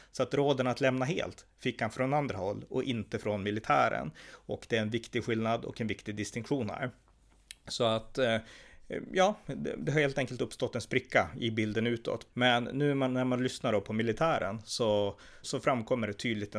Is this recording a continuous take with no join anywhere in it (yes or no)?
no